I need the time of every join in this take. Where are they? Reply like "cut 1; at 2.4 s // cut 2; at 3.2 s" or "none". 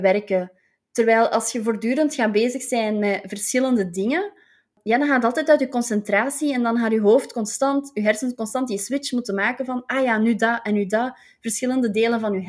none